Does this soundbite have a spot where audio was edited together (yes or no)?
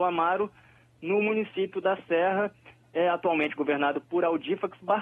no